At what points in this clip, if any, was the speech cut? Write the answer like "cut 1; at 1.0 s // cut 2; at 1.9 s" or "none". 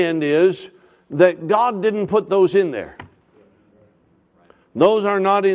none